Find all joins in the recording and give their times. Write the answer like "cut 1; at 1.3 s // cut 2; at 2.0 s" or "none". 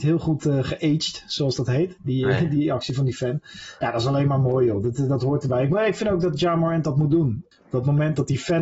cut 1; at 7.5 s